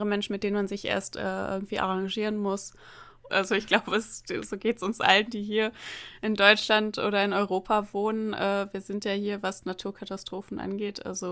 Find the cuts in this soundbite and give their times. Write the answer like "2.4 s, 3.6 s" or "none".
3.3 s